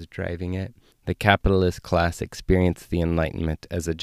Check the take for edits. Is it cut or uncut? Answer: cut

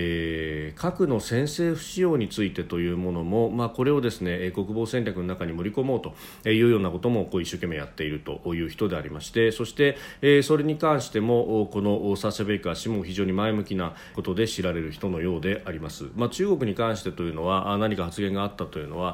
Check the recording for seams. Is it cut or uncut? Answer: cut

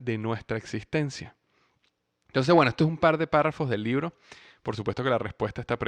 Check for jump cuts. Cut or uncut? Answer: uncut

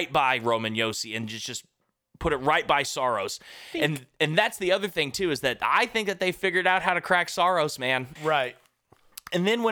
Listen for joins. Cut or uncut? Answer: cut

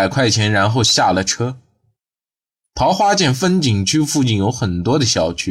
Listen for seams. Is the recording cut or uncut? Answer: uncut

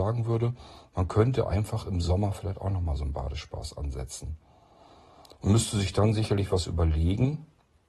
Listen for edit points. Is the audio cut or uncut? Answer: uncut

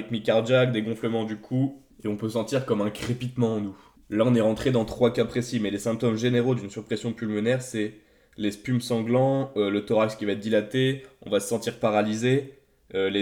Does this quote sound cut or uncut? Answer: uncut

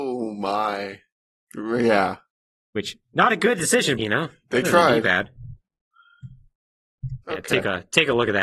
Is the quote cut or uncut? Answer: cut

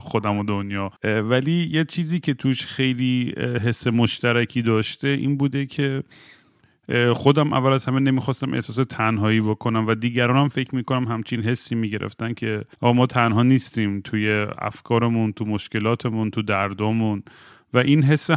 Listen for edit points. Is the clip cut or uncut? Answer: cut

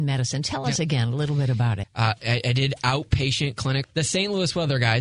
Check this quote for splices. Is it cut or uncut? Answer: cut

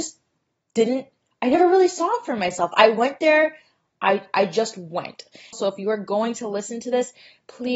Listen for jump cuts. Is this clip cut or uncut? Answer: cut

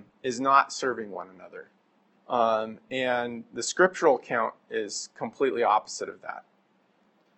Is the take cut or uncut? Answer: cut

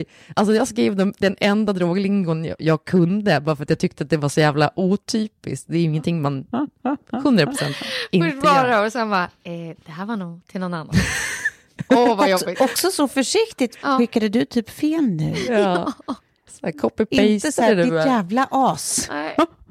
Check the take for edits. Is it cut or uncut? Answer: uncut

